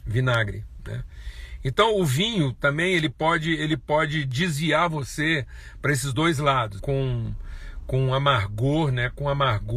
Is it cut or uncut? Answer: cut